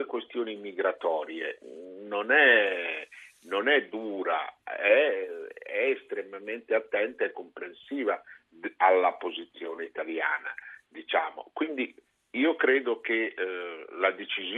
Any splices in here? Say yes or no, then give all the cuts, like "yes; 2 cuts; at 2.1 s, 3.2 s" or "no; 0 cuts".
no; 0 cuts